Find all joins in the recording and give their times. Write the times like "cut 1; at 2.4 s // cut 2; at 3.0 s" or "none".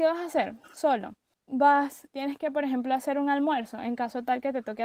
cut 1; at 2.1 s